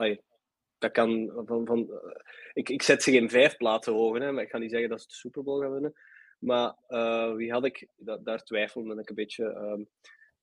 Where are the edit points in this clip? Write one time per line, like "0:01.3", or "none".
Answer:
0:08.0